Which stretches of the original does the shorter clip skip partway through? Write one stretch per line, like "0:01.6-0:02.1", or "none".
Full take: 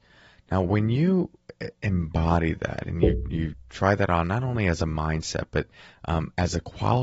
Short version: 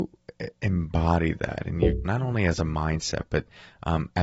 0:03.3-0:04.3